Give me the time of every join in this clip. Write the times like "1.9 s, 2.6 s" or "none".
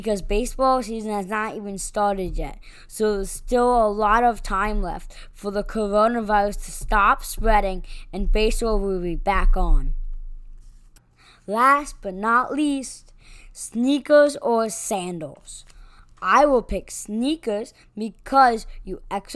none